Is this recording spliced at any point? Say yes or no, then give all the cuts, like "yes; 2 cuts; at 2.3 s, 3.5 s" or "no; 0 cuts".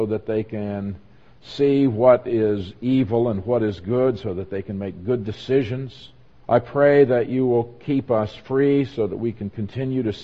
yes; 1 cut; at 6.4 s